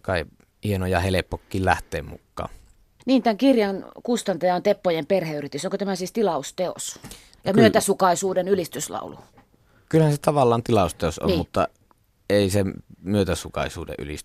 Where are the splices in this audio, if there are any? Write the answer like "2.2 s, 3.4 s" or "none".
none